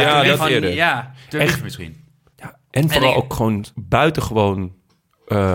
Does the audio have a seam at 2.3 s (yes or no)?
yes